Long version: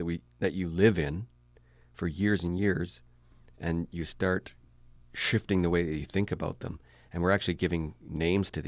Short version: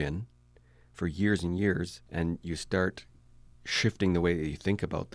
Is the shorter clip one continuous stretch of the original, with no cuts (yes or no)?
no